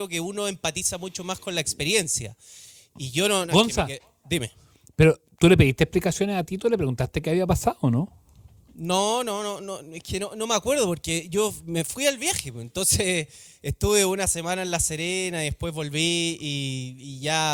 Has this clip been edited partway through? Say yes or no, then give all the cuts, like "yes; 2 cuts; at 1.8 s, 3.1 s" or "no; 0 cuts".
no; 0 cuts